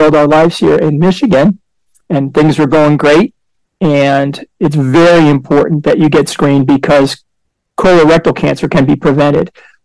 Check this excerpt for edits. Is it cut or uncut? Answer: cut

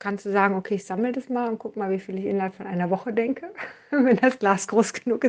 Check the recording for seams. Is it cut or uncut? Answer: uncut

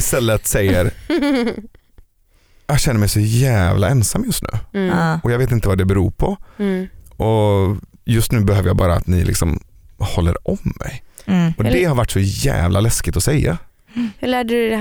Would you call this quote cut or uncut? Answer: uncut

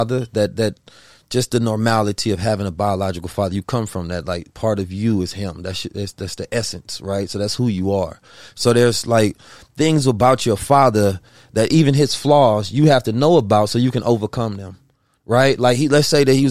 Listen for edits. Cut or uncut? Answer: uncut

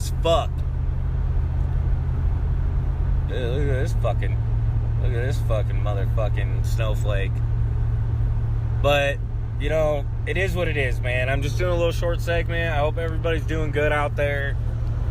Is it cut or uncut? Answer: cut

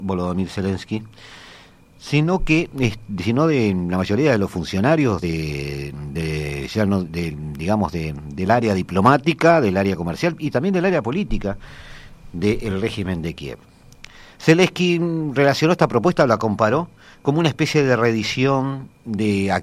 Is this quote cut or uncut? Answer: uncut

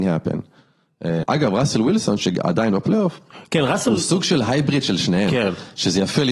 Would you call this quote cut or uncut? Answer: cut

